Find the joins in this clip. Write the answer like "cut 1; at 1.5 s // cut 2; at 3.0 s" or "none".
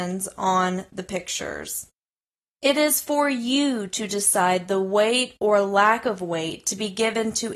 none